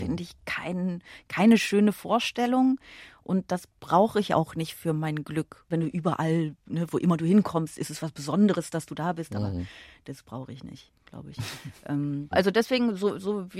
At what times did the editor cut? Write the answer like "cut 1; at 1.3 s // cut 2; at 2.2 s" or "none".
cut 1; at 5.7 s // cut 2; at 12.3 s